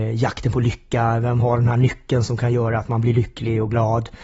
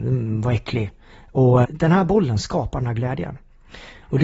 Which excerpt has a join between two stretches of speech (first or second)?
second